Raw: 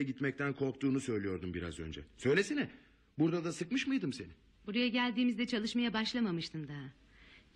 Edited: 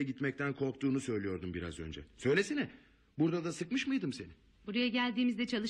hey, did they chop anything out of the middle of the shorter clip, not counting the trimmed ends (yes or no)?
no